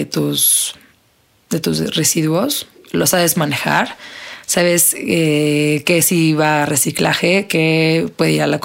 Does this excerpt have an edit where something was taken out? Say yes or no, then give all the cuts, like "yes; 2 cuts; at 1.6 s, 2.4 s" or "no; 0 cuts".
yes; 1 cut; at 2.8 s